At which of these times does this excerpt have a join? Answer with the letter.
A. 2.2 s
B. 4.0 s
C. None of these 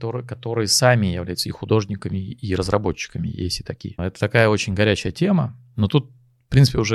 B